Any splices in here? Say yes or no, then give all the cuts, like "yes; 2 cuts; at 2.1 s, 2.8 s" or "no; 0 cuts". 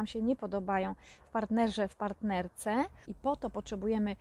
yes; 1 cut; at 3.0 s